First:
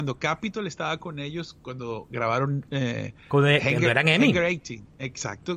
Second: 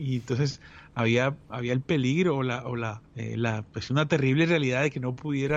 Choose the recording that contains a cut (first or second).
second